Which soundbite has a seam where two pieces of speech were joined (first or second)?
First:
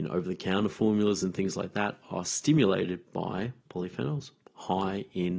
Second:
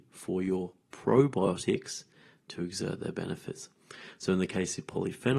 first